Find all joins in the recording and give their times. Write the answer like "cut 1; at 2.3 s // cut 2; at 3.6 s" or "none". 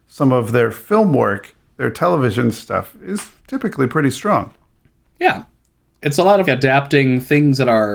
cut 1; at 3.4 s // cut 2; at 6.4 s